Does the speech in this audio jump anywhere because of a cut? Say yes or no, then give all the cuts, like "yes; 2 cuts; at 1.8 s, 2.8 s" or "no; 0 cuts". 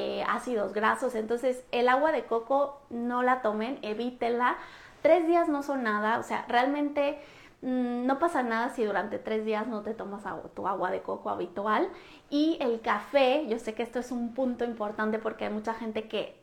no; 0 cuts